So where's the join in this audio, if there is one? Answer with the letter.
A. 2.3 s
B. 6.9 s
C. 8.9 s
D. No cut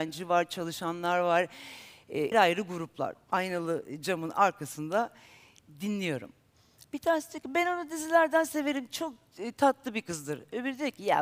A